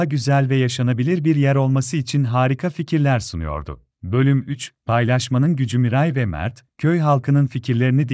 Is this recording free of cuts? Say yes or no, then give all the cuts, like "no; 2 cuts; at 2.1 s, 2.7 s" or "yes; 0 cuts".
no; 1 cut; at 3.9 s